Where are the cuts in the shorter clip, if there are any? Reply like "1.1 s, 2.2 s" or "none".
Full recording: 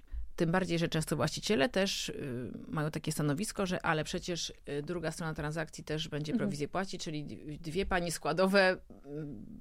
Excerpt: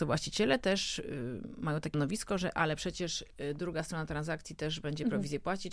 1.9 s